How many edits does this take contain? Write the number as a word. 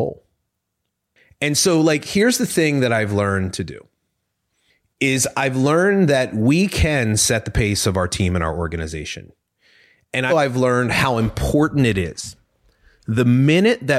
one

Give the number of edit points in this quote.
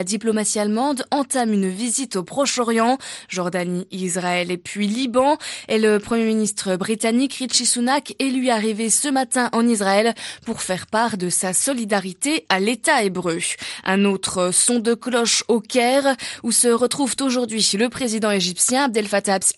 zero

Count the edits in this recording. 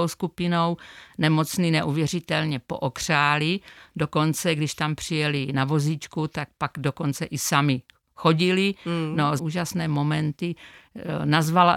one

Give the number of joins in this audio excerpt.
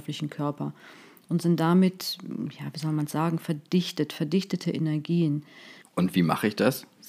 one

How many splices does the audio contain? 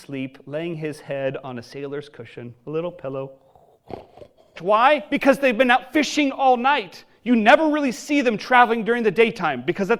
one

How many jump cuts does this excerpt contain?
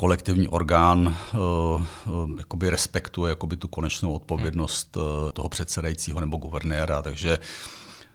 one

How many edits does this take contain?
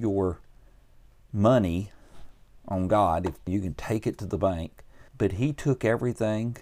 two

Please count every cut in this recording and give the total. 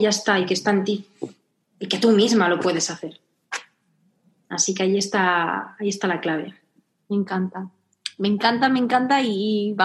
zero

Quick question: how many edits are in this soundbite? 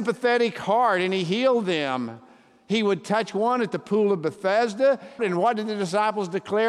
one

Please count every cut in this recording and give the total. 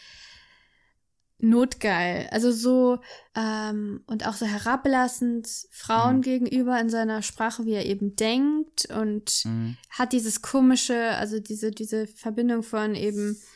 one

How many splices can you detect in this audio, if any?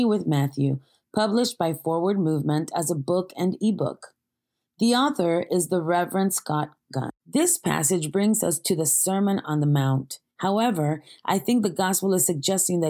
one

